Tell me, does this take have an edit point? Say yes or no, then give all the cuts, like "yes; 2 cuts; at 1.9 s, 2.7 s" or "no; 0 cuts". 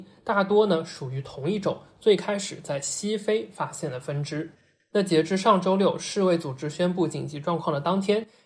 no; 0 cuts